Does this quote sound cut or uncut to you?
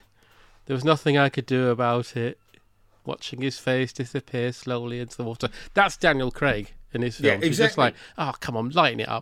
uncut